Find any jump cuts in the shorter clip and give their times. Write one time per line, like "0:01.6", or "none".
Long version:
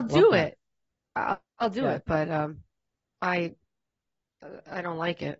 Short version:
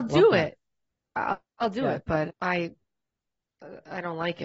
0:02.3